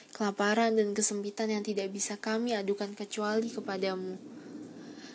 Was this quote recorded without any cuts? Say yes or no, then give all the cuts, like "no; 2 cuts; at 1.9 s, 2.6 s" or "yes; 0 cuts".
yes; 0 cuts